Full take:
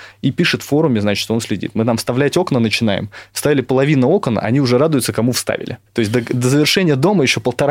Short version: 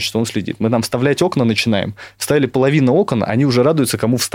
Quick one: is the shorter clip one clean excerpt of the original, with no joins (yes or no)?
yes